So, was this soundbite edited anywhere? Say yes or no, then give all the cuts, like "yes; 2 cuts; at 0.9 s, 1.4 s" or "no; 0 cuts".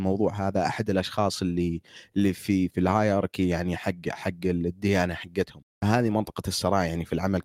yes; 1 cut; at 2.7 s